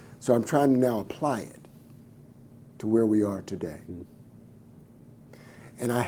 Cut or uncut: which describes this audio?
uncut